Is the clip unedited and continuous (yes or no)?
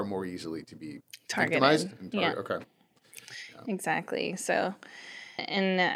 yes